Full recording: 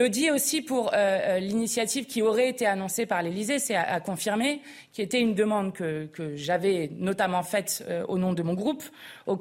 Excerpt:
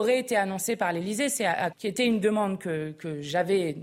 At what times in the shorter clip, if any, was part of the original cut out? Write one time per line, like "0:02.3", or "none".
0:01.7